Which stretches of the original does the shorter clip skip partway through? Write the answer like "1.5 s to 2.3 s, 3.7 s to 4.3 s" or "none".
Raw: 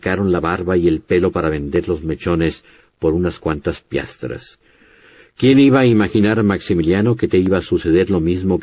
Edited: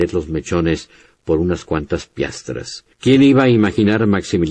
4.7 s to 5.3 s